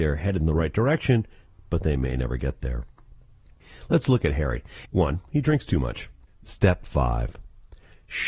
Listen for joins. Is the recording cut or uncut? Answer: cut